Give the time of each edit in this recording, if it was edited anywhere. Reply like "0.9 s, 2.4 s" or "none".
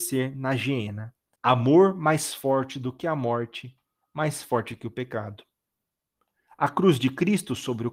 1.4 s